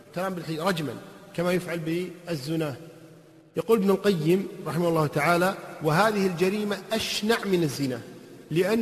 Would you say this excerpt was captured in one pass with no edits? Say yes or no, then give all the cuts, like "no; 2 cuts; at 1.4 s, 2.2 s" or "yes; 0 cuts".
yes; 0 cuts